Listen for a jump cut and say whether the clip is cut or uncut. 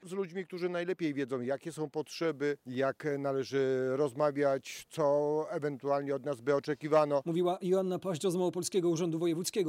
cut